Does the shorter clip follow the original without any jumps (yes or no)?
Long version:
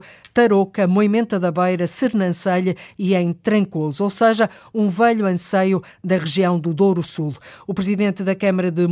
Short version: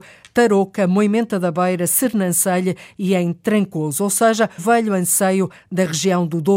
no